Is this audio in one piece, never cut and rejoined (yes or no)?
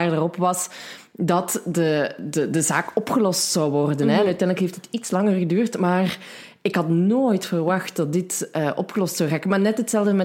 yes